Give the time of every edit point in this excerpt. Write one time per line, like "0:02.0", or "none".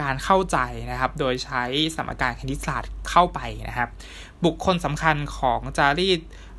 none